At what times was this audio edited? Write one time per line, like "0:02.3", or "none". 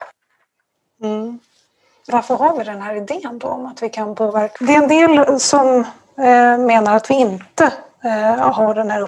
0:02.1
0:04.6